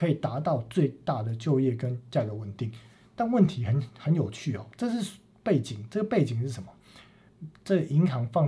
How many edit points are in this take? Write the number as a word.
zero